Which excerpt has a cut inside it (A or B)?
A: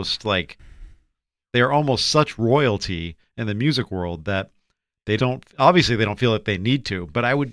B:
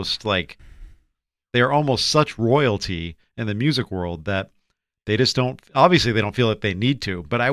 A